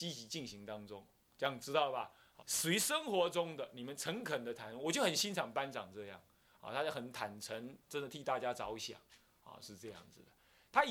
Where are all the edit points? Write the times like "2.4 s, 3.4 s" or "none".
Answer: 2.4 s